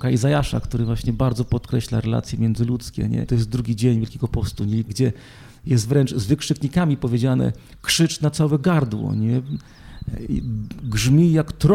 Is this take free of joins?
no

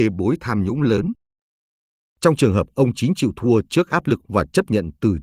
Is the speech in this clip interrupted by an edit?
no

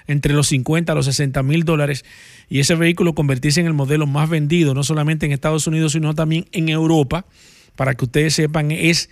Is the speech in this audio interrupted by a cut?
no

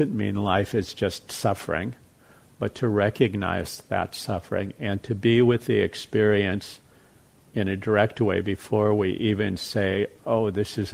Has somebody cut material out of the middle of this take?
no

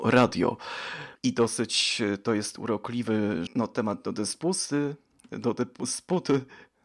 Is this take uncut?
no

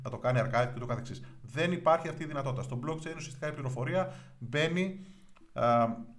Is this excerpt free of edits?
yes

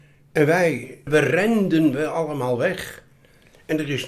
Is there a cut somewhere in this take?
yes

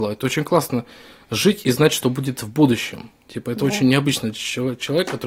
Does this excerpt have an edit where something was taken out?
no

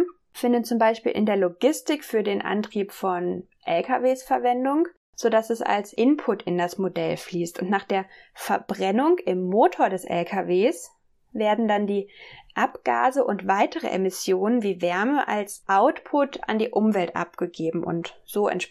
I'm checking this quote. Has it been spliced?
no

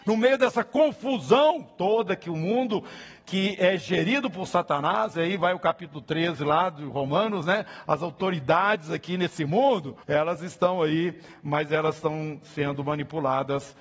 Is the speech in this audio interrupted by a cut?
yes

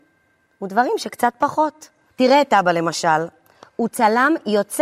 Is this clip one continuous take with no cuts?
no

